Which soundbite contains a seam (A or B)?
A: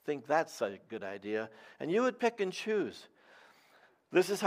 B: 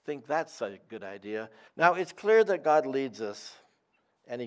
B